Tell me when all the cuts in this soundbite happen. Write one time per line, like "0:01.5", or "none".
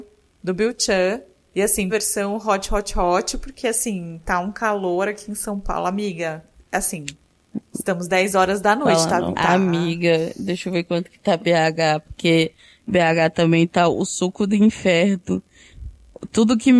0:01.9
0:09.3